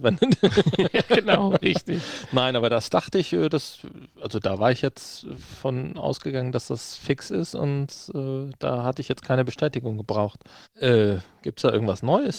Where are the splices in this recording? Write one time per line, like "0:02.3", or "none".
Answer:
0:10.6

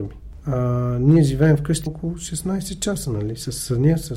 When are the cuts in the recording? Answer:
0:01.9

